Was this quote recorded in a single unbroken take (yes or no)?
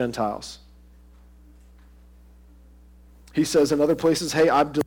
yes